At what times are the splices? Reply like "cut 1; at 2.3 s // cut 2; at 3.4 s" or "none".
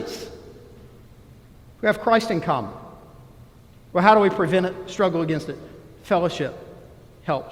none